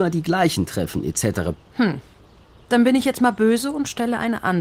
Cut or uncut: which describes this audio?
cut